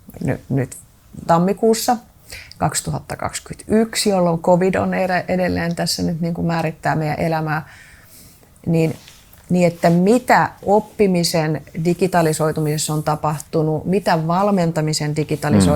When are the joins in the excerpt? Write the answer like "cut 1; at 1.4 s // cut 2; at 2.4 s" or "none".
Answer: cut 1; at 1.2 s